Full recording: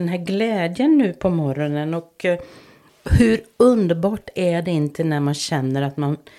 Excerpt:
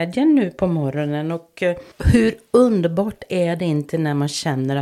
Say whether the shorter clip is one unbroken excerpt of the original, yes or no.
no